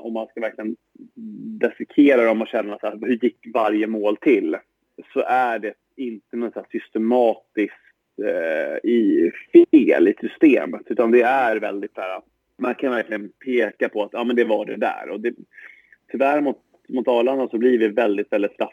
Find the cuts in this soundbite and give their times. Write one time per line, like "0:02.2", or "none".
none